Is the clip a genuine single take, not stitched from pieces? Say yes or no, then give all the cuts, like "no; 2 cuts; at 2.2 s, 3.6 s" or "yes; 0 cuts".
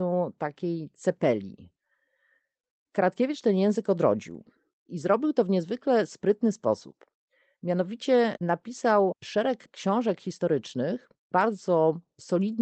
yes; 0 cuts